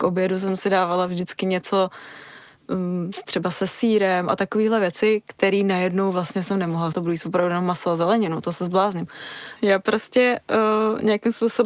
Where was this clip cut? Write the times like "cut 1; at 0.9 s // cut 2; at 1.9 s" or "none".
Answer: cut 1; at 6.9 s // cut 2; at 9.6 s